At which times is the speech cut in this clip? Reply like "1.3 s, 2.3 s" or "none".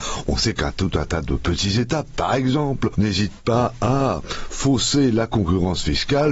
none